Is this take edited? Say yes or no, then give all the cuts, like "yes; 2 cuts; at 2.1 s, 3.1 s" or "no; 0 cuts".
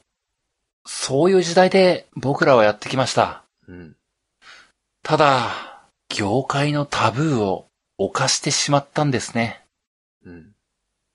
yes; 2 cuts; at 6.0 s, 7.8 s